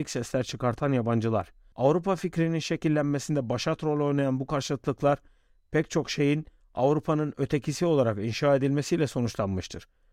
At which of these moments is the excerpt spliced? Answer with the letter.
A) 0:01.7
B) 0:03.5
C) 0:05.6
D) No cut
A